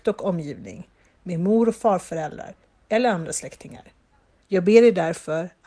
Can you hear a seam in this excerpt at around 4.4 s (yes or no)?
yes